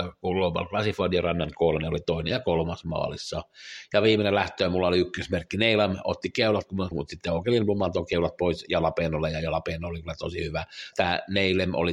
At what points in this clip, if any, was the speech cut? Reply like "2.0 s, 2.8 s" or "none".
6.9 s, 10.9 s